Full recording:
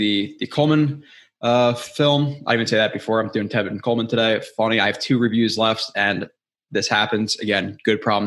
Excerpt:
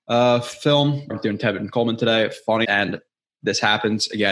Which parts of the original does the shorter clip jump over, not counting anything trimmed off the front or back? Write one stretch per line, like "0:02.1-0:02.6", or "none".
0:02.4-0:03.2
0:04.7-0:05.9